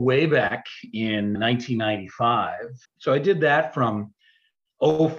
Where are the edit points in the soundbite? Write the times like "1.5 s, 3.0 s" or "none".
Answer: 1.4 s, 2.8 s